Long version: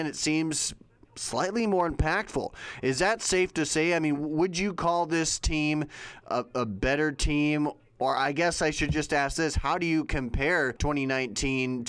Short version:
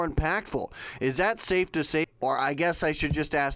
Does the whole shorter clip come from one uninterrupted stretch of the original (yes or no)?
no